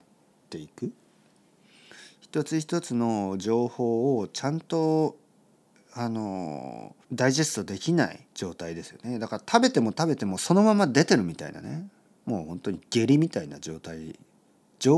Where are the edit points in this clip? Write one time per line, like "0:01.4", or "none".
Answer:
0:07.0
0:08.3